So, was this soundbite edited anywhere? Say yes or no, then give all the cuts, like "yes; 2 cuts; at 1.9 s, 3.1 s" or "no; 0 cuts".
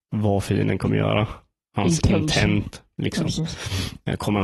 no; 0 cuts